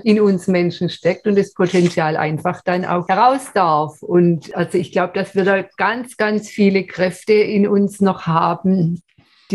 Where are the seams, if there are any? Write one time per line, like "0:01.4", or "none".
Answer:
none